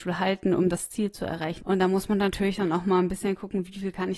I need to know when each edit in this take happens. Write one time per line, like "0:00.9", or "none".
0:01.6